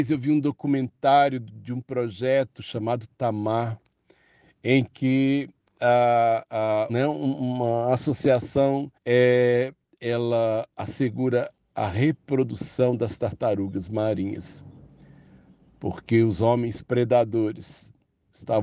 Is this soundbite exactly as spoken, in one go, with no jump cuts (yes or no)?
no